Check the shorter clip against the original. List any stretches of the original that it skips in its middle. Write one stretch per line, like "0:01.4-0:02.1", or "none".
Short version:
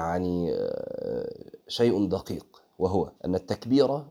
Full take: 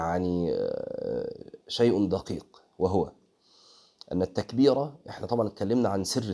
0:03.2-0:04.0